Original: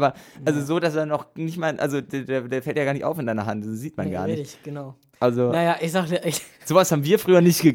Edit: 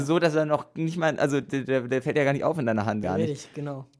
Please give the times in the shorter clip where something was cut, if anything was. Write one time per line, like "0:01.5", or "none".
0:03.0